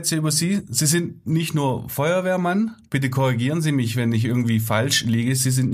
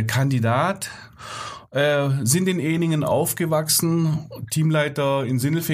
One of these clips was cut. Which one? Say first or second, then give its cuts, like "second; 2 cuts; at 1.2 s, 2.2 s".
first; 1 cut; at 2.9 s